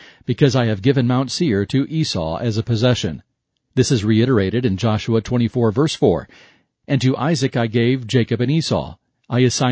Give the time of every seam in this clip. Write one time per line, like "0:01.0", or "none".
none